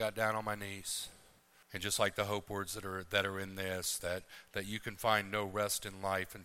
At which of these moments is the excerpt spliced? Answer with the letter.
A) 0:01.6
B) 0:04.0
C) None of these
A